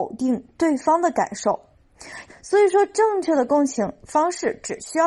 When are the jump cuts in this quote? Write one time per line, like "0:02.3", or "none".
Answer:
0:02.3

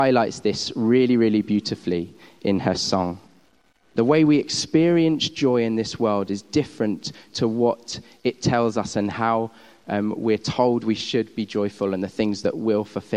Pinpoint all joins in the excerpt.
0:04.0

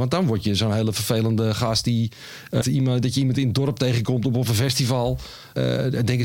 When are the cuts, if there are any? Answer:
0:02.6

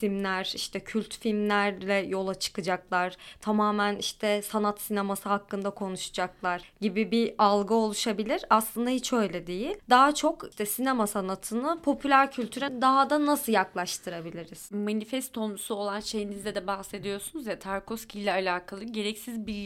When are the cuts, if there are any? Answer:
none

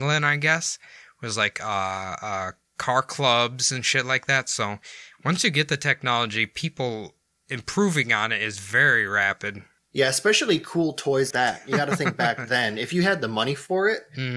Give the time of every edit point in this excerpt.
0:11.3

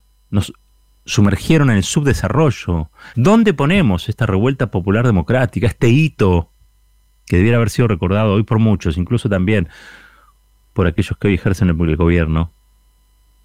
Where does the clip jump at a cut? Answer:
0:03.1

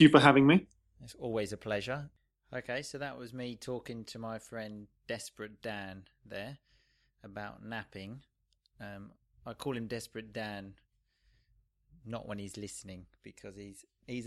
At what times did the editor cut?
none

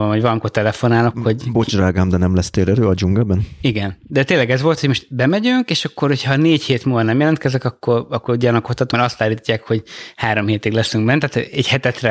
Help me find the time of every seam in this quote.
none

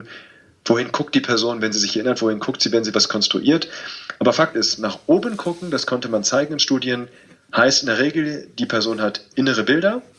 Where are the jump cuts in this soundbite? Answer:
none

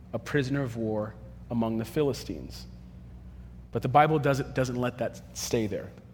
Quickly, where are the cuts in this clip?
none

